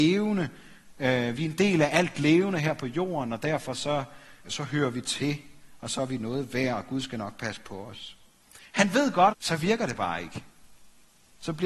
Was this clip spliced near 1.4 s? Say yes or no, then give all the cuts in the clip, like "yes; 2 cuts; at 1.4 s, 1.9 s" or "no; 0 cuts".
no; 2 cuts; at 4.4 s, 9.3 s